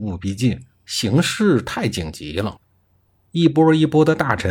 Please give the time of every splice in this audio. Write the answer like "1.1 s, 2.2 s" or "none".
3.2 s